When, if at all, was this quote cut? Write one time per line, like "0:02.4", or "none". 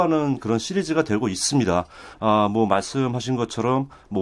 none

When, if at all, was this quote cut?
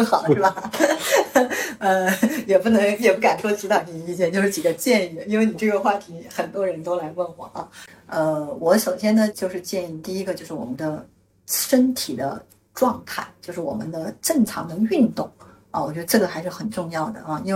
0:09.3

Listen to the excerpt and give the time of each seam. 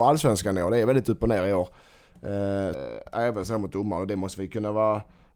0:02.7

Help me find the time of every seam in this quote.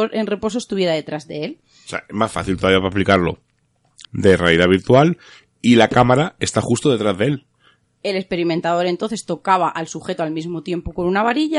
0:04.0
0:07.8

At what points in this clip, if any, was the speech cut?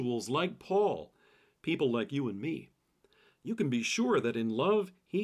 none

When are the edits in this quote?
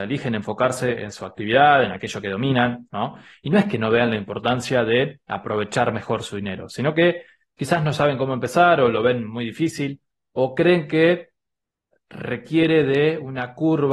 0:02.9

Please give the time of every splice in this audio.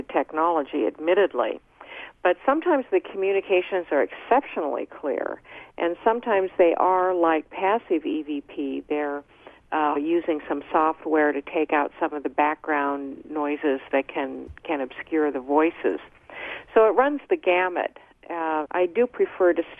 0:10.0
0:18.6

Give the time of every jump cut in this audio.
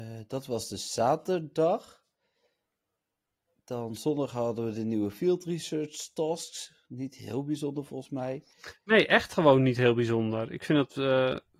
none

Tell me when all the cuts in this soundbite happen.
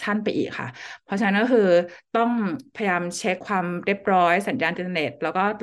0:03.4

